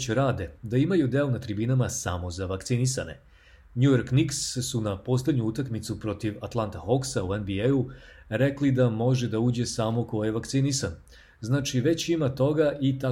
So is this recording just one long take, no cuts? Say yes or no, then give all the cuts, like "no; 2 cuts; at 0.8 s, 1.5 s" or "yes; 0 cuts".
yes; 0 cuts